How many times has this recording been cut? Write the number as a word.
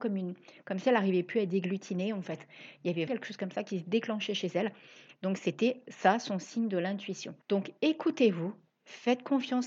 two